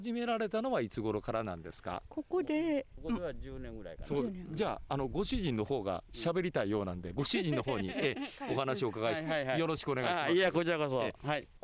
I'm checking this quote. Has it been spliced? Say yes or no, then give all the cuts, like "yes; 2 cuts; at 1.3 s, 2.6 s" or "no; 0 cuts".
no; 0 cuts